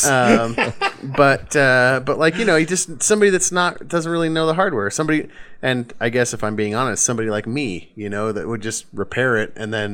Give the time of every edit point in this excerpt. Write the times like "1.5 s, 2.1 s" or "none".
none